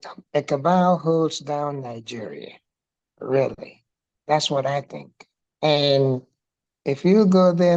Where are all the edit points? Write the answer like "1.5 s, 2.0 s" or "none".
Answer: none